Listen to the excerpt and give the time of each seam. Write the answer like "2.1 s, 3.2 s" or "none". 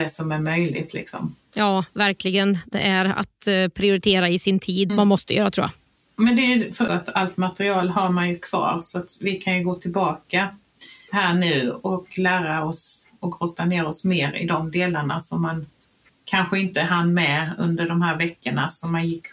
4.9 s, 6.9 s

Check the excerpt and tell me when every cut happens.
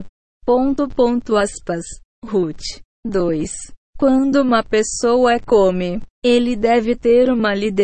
0.9 s

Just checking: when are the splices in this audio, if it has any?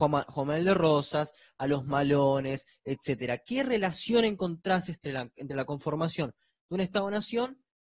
none

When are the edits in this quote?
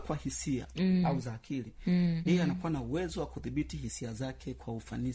1.0 s, 2.3 s

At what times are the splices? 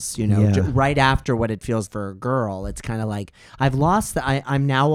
1.9 s

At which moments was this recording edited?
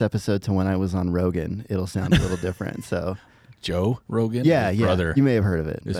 none

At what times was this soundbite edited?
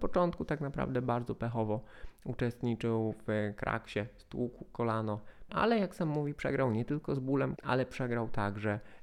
5.5 s, 7.6 s

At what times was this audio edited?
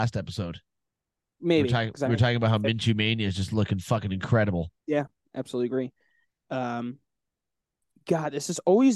4.8 s, 6.4 s

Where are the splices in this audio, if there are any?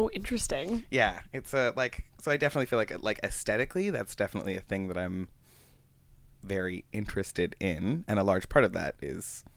none

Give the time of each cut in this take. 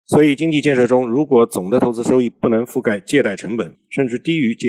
2.3 s, 3.7 s

